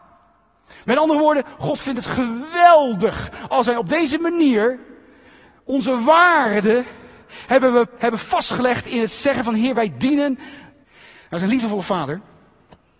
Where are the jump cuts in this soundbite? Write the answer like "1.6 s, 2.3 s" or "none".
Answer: 8.0 s, 10.8 s